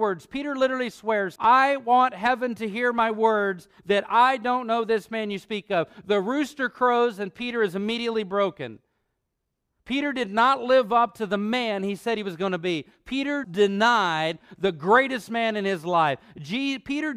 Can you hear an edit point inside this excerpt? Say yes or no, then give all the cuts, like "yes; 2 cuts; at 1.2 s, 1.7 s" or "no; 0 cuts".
yes; 2 cuts; at 1.4 s, 13.4 s